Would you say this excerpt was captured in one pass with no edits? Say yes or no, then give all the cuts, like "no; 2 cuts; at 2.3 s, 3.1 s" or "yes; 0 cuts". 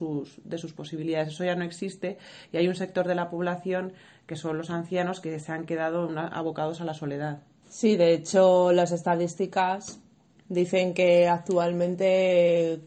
yes; 0 cuts